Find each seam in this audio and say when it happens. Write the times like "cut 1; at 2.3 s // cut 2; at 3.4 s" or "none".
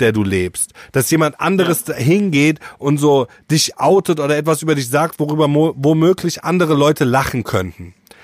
none

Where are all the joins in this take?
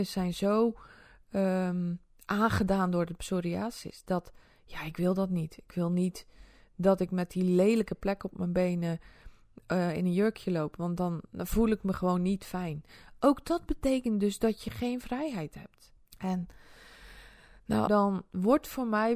cut 1; at 16.0 s // cut 2; at 17.9 s

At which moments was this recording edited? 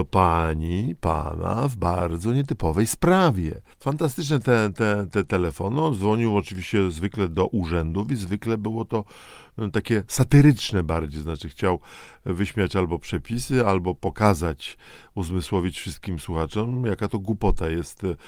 cut 1; at 3.7 s

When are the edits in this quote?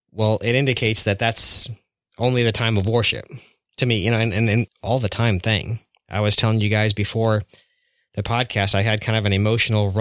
cut 1; at 4.7 s

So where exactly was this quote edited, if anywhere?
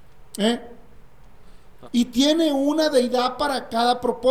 cut 1; at 1.8 s

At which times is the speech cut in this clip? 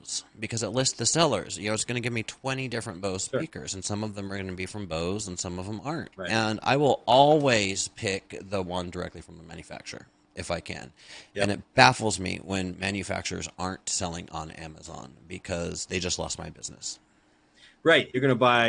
cut 1; at 6.1 s

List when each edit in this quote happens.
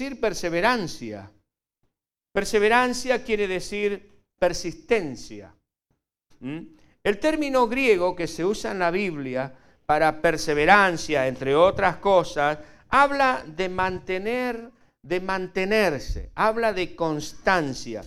cut 1; at 6.3 s

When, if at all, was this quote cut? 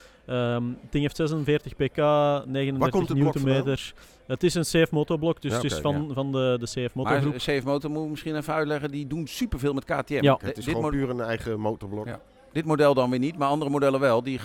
cut 1; at 10.4 s

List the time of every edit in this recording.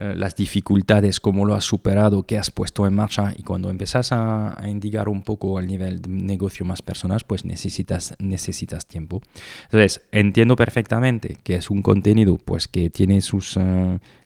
none

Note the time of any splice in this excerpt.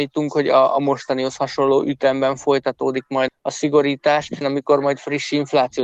cut 1; at 3.3 s // cut 2; at 4.4 s

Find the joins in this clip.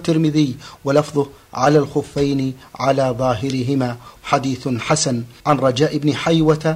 cut 1; at 4.2 s // cut 2; at 5.4 s

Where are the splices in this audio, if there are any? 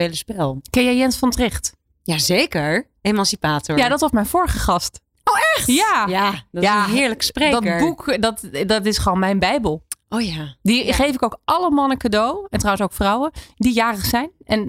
none

